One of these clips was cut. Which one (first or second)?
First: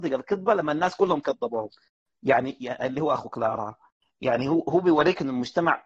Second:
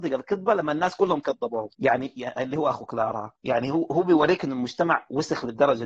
second